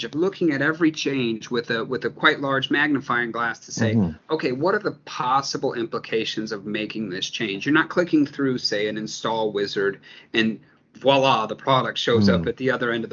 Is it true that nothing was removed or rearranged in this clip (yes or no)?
yes